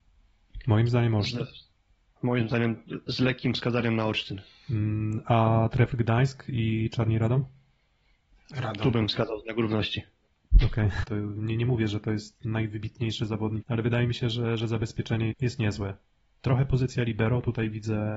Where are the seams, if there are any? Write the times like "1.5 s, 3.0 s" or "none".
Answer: 11.0 s, 13.6 s, 15.3 s